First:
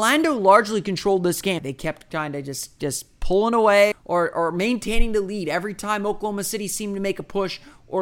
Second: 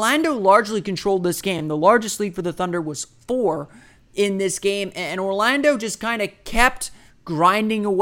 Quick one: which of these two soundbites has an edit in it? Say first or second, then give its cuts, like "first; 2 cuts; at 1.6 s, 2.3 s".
first; 2 cuts; at 1.6 s, 3.9 s